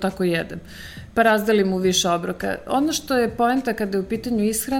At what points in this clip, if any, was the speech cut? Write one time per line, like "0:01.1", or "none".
none